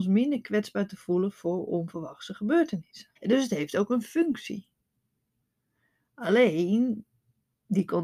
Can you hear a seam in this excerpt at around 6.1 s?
no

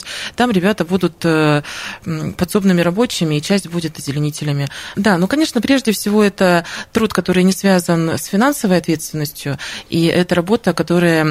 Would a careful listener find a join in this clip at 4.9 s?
yes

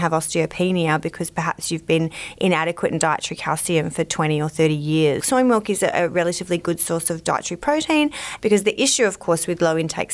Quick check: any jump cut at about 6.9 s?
no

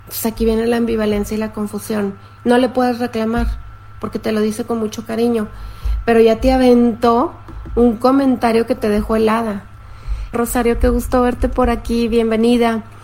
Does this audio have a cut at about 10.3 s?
yes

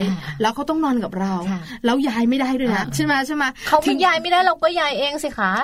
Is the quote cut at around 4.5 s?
no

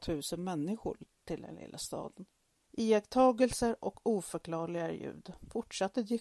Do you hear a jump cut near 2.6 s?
yes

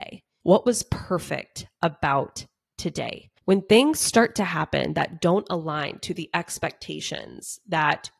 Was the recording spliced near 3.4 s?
yes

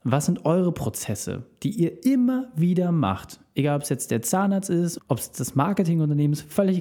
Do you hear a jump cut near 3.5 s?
no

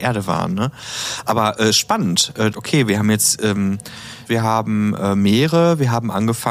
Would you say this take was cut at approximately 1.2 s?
no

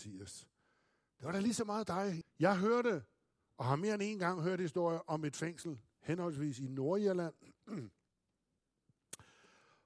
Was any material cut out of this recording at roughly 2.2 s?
yes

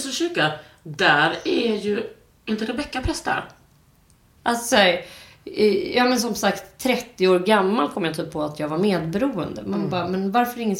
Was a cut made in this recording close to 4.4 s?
yes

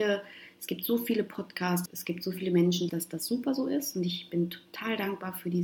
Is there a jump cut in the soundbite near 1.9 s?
yes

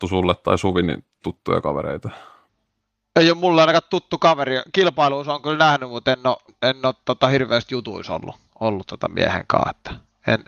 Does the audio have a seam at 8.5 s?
no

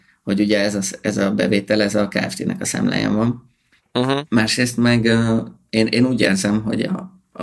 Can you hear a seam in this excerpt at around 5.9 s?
no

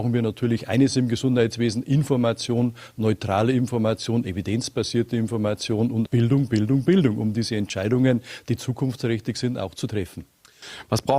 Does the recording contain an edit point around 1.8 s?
no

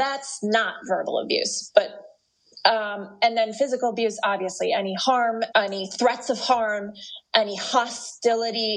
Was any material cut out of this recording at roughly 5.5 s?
yes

